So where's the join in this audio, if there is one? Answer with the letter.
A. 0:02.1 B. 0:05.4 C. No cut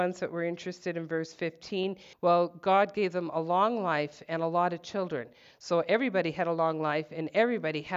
A